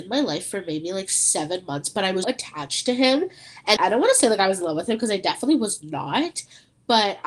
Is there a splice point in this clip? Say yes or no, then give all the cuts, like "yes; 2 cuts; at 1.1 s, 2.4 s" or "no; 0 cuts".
yes; 2 cuts; at 2.2 s, 3.8 s